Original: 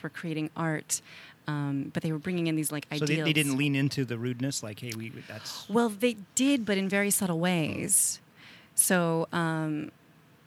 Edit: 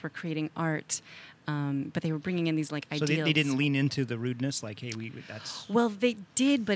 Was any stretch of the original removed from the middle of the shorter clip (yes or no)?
no